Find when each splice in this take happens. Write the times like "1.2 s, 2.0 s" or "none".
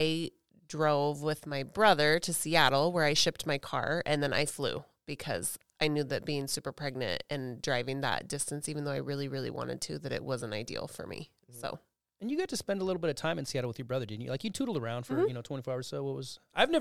none